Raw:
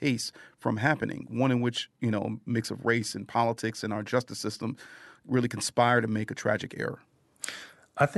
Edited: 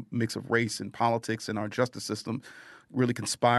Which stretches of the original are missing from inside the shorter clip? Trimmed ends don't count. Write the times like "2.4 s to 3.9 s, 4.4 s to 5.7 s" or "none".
none